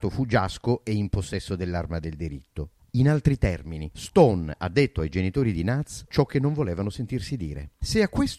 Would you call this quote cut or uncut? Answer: cut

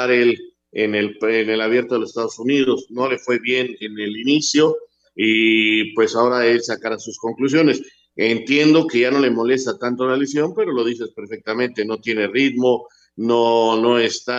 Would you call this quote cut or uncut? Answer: uncut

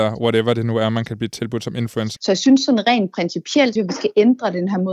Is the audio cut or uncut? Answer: cut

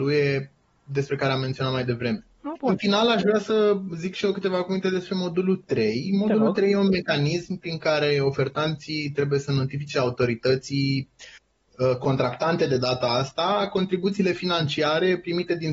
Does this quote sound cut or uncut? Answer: cut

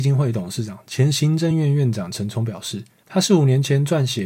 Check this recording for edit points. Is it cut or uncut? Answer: uncut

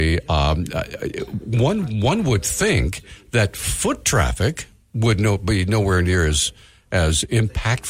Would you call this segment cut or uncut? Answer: uncut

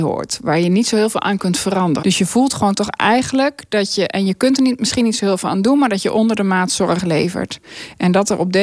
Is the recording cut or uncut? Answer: cut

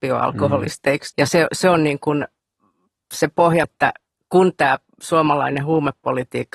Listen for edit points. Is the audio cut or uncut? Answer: cut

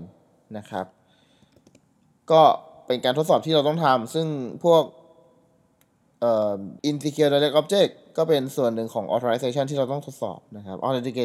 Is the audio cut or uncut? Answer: cut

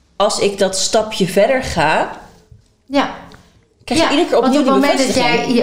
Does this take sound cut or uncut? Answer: uncut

